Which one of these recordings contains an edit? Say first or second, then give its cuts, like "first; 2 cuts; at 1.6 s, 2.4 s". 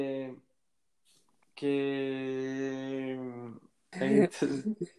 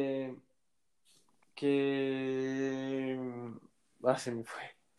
first; 1 cut; at 3.9 s